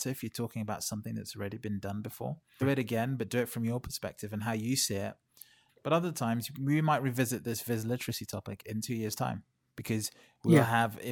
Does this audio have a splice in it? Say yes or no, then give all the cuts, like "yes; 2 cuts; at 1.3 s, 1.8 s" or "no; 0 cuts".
yes; 2 cuts; at 2.6 s, 5.7 s